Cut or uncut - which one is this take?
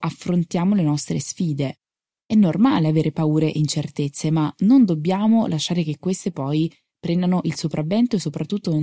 uncut